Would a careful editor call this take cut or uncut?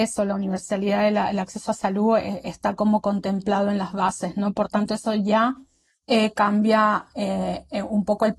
uncut